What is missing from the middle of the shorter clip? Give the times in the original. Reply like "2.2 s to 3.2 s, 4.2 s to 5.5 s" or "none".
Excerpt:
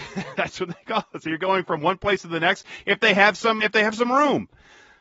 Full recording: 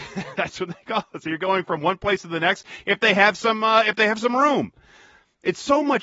3.6 s to 3.8 s